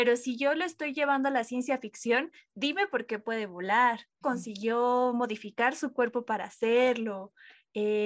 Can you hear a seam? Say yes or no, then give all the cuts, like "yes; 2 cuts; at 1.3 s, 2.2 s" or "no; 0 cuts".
yes; 1 cut; at 4.2 s